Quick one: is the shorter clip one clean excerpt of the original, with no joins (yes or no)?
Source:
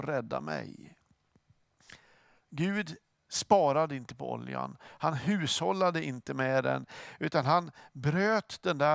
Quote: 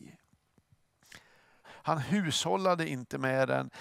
no